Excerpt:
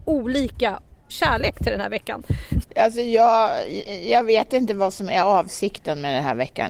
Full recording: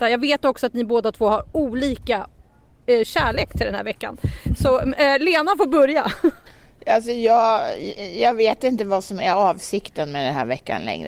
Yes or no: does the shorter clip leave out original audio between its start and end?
yes